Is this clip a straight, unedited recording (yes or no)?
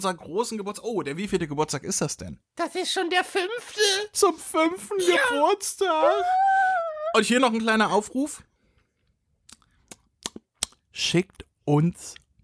no